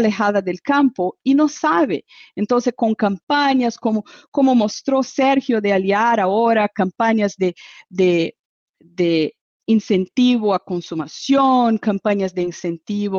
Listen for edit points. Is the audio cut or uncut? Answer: uncut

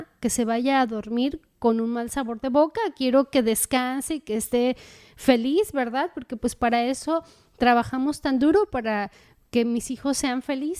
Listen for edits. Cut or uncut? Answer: uncut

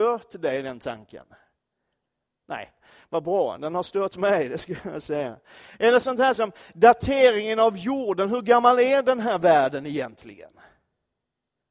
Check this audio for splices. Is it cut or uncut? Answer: uncut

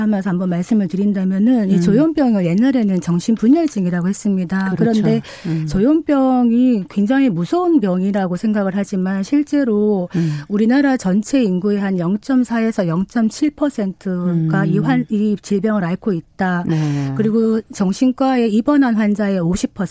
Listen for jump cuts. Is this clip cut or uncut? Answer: uncut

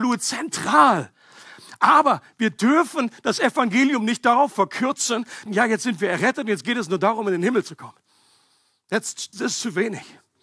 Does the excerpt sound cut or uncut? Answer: cut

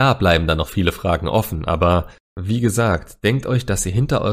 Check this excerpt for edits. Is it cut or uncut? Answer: uncut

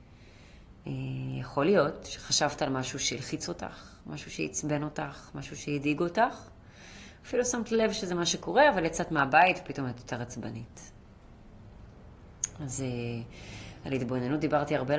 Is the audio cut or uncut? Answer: uncut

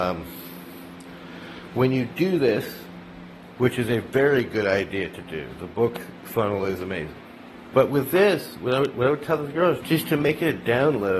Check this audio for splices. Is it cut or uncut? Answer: cut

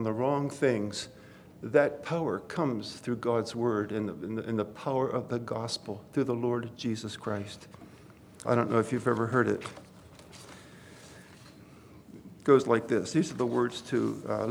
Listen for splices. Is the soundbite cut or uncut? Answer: cut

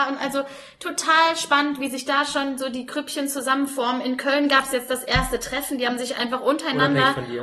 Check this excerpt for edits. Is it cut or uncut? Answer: uncut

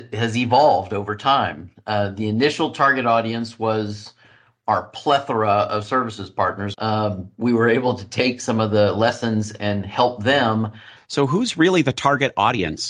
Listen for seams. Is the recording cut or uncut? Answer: cut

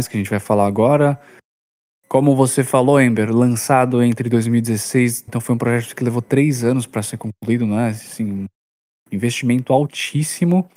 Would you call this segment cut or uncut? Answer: cut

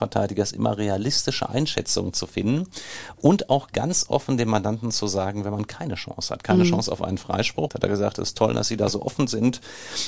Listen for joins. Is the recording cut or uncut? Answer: cut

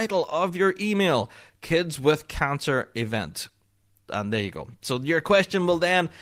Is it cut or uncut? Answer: uncut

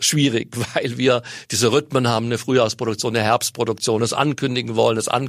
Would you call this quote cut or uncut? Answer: uncut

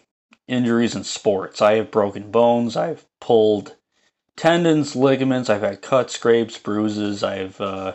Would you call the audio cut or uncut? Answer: uncut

